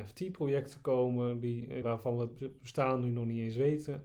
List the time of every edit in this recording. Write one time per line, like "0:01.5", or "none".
0:01.8